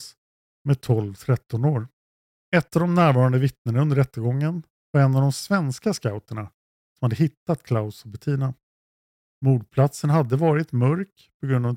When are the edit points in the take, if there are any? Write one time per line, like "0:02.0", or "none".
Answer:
0:02.3
0:09.3